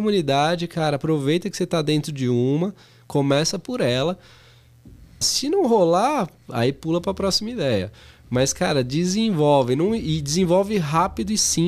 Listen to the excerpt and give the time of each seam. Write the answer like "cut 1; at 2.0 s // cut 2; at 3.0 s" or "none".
cut 1; at 5.2 s